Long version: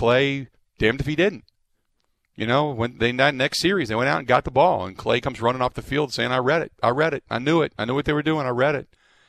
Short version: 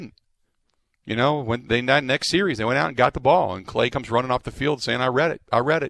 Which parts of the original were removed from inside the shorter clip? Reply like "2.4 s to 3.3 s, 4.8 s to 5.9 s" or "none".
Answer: none